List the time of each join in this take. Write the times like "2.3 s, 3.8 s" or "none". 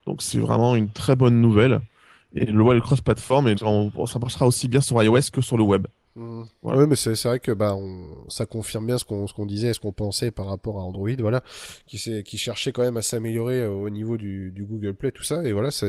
3.5 s

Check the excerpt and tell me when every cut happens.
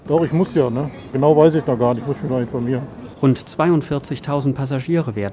1.1 s

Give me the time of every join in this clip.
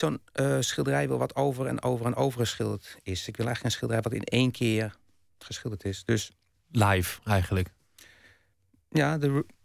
none

